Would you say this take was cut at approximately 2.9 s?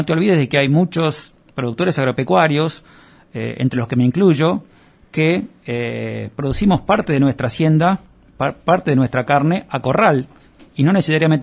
no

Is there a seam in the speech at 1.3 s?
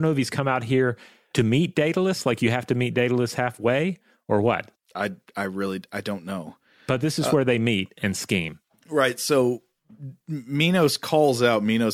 yes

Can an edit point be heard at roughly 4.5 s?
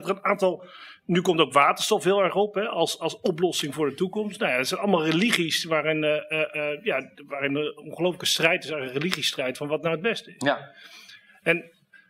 no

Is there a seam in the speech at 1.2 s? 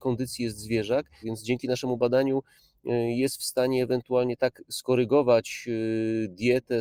yes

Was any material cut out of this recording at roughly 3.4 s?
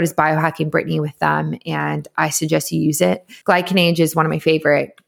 yes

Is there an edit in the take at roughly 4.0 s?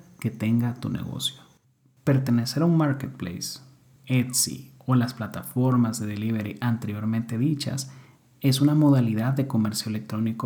yes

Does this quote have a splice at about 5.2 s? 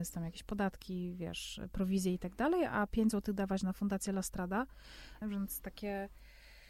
yes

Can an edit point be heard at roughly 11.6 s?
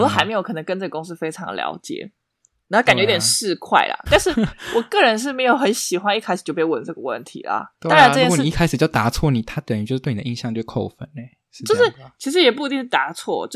no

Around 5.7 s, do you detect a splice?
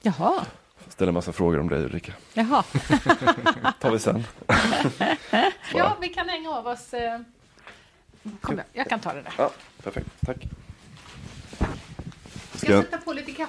yes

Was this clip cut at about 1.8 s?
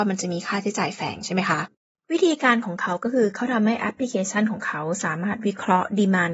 no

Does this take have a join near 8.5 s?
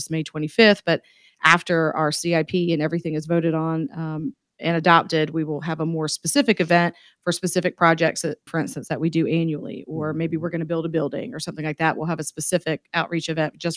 yes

